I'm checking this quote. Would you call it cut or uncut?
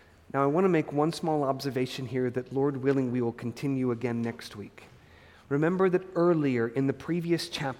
uncut